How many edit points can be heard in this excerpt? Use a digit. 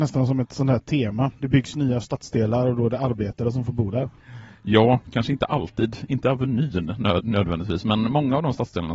0